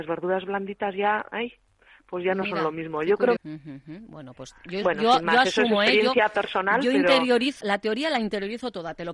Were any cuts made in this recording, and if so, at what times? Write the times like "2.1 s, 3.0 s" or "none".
3.4 s, 7.6 s